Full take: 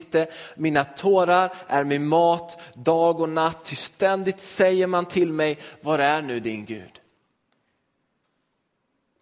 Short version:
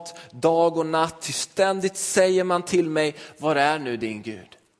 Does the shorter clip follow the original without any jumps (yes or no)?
yes